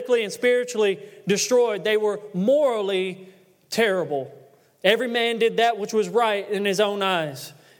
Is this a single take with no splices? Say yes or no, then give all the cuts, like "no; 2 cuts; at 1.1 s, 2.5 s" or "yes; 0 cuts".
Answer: yes; 0 cuts